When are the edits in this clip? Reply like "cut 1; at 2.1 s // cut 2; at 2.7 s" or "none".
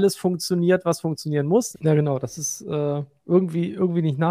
cut 1; at 1.7 s